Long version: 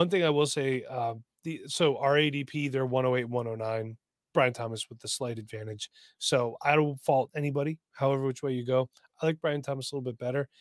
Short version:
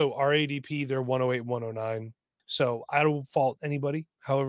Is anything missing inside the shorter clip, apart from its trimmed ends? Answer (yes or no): yes